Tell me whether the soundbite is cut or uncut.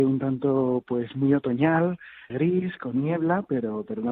cut